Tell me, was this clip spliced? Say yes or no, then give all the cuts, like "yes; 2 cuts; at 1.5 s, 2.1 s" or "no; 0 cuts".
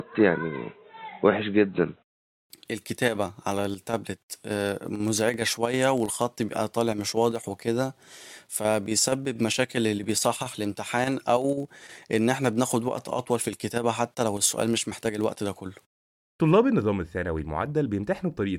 no; 0 cuts